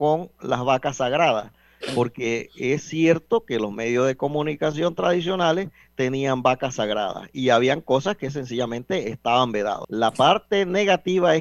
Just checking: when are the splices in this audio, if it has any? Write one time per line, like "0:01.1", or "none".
0:09.8